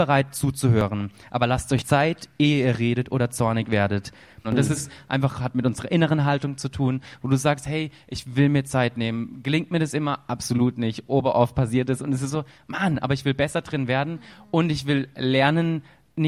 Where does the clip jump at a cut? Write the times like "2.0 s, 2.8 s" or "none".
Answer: 4.4 s